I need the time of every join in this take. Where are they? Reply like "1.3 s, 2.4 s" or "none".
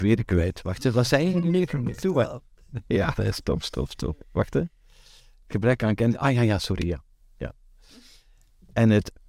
none